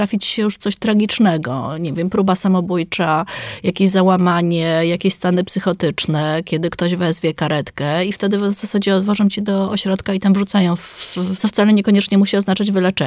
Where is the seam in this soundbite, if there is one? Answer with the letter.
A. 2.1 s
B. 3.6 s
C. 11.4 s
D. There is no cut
C